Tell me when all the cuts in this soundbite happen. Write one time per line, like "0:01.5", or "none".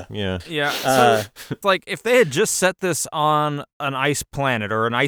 0:01.6